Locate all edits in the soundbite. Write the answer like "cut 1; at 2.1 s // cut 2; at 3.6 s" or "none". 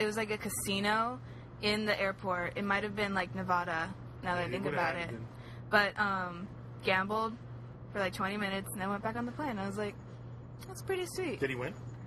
cut 1; at 6.8 s